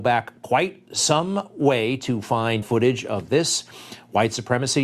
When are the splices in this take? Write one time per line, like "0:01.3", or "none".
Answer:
0:02.6